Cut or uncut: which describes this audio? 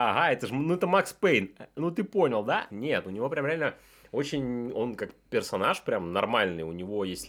cut